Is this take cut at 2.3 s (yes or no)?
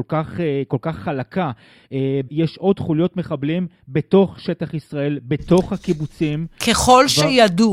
yes